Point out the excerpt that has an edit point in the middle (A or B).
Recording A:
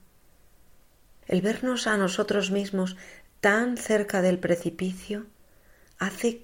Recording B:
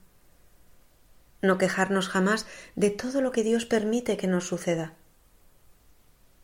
A